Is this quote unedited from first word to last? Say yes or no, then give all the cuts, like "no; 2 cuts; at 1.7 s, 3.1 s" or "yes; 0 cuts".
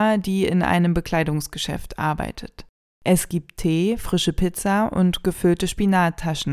yes; 0 cuts